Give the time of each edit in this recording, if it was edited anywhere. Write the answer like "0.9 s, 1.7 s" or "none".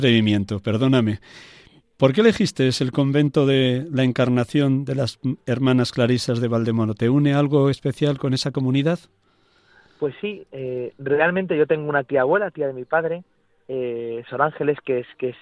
none